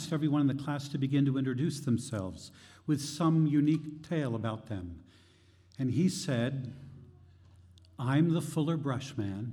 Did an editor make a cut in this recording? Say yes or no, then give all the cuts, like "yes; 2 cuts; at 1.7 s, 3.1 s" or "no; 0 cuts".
no; 0 cuts